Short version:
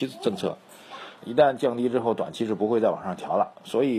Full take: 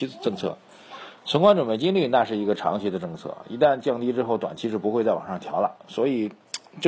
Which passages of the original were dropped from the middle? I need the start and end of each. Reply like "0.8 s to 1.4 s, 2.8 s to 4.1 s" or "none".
1.2 s to 3.4 s